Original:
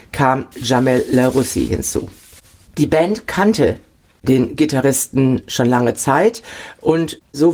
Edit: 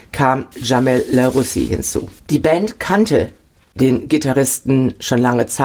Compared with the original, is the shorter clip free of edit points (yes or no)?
no